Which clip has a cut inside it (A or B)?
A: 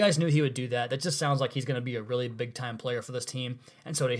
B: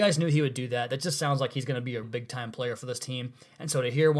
B